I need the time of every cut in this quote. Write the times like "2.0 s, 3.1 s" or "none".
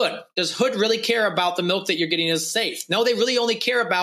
none